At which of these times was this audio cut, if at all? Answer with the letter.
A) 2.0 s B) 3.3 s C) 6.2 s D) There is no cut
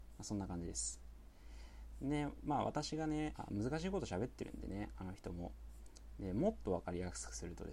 B